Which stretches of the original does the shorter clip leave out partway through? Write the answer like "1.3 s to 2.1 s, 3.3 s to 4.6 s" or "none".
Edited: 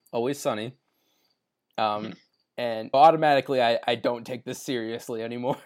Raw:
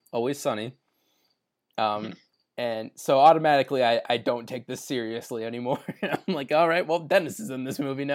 2.9 s to 3.2 s